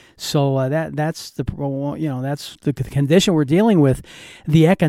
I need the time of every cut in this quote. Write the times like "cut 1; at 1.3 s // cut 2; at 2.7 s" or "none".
none